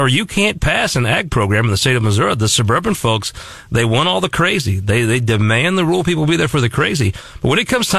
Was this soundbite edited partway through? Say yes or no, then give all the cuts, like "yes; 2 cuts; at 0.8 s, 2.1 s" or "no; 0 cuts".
no; 0 cuts